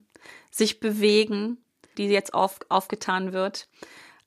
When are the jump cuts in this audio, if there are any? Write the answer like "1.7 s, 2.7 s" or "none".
2.0 s